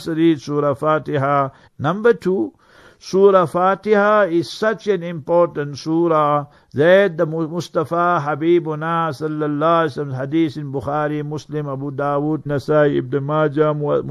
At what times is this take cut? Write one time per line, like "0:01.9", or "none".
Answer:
0:01.7
0:12.5